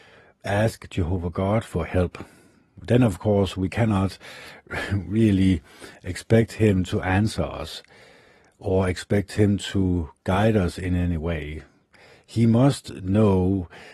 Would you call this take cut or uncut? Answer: cut